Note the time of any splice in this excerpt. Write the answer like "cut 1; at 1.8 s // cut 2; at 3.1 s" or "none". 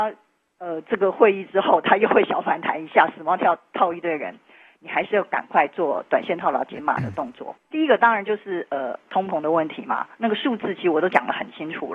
cut 1; at 7.6 s // cut 2; at 9.1 s